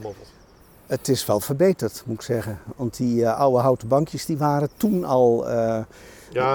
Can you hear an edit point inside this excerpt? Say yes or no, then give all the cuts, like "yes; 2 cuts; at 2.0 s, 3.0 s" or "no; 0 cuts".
no; 0 cuts